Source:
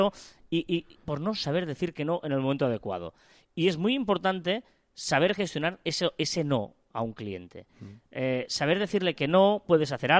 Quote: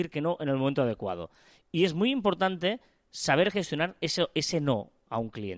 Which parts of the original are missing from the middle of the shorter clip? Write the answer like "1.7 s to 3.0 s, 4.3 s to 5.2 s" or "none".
none